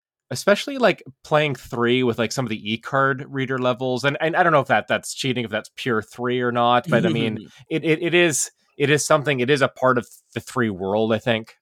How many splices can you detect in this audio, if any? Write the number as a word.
zero